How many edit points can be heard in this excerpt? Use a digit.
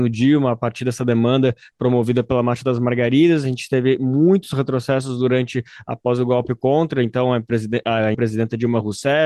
1